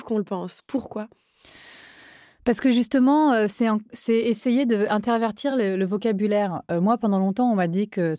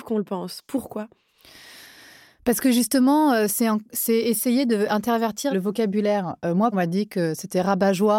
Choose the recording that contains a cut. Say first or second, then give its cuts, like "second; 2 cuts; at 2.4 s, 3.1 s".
second; 2 cuts; at 5.5 s, 6.7 s